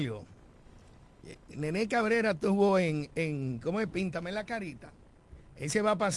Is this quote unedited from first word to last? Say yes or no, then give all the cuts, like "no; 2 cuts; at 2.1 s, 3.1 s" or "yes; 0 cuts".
yes; 0 cuts